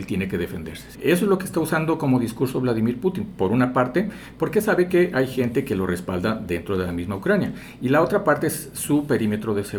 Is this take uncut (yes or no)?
no